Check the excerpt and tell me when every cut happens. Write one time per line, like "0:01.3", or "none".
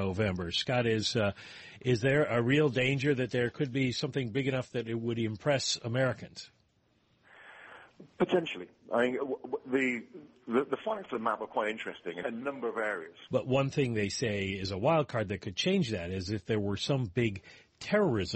0:12.2
0:13.3